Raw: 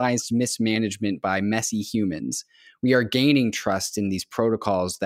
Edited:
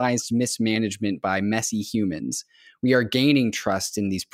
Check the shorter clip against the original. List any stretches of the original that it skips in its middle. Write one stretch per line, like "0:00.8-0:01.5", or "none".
none